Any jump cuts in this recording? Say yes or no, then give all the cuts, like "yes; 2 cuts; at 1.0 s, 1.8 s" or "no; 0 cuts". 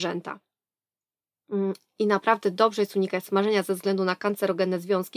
no; 0 cuts